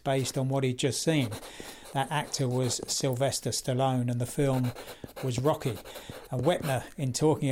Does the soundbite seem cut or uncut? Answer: uncut